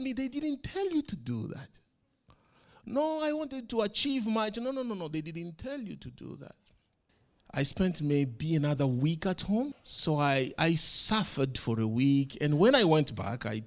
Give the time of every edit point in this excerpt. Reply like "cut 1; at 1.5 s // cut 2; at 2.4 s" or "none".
cut 1; at 9.7 s